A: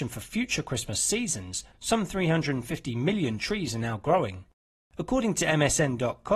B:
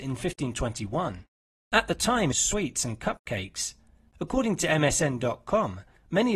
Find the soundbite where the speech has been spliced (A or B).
B